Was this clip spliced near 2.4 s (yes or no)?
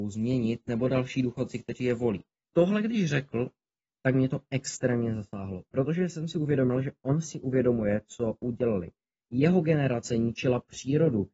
yes